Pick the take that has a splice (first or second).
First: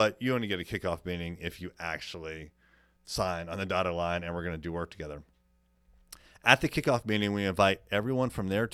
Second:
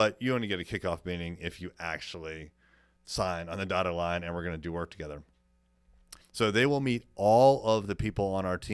second